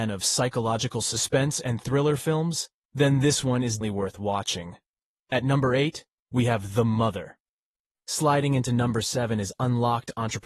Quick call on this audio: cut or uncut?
cut